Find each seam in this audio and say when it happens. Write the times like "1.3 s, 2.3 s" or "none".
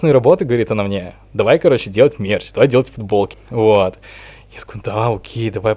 3.3 s